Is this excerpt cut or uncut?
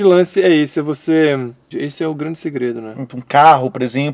cut